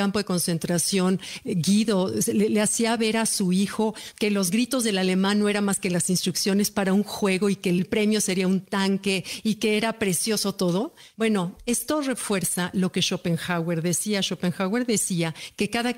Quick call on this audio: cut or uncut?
uncut